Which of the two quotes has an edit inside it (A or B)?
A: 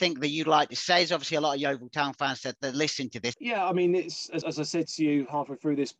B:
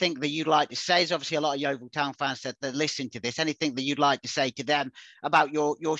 A